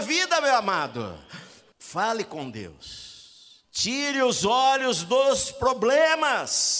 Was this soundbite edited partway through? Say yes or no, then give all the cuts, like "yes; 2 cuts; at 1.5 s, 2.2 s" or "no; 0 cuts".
yes; 2 cuts; at 1.7 s, 3.6 s